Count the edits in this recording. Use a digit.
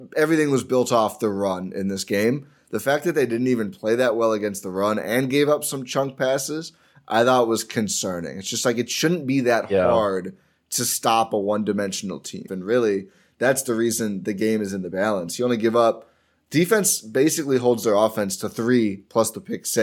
1